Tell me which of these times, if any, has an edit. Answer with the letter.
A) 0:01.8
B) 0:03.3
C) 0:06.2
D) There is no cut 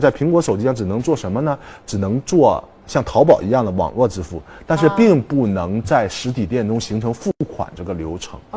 D